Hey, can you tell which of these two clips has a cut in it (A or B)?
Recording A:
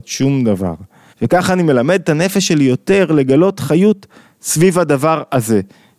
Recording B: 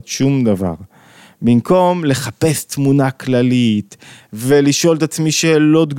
A